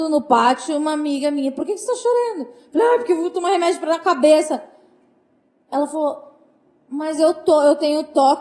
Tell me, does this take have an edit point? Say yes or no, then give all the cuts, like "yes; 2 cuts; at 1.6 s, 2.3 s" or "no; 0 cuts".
no; 0 cuts